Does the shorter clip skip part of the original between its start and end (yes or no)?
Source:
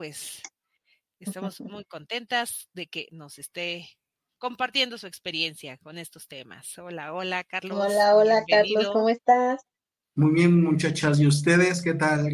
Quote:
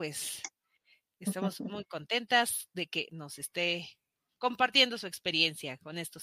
no